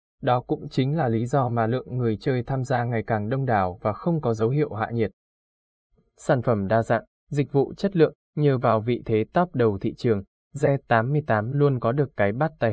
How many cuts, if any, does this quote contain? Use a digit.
0